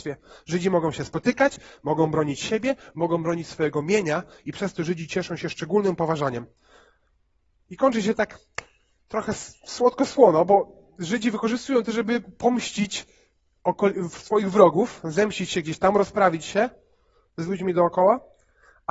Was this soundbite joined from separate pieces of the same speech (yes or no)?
no